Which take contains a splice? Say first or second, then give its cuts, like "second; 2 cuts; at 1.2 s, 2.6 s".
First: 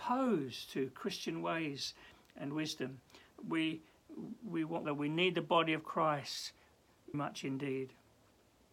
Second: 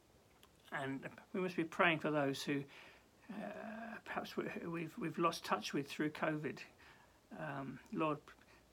first; 2 cuts; at 4.8 s, 7.1 s